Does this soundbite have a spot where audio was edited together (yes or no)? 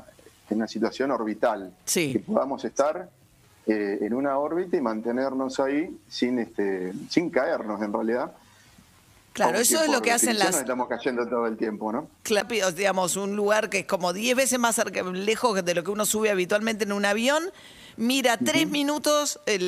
no